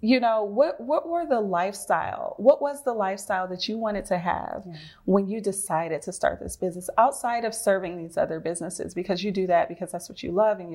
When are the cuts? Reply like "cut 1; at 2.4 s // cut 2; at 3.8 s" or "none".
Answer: none

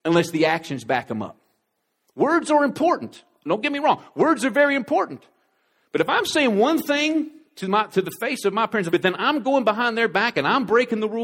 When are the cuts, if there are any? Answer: cut 1; at 8.9 s

